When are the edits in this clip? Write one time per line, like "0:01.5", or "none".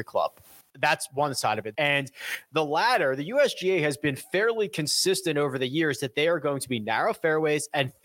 0:01.7